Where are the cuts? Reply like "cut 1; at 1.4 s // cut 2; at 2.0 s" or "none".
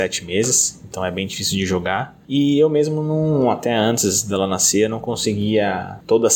none